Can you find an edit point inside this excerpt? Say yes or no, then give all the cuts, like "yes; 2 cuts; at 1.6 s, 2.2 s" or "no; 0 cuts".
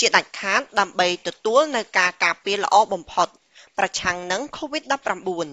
no; 0 cuts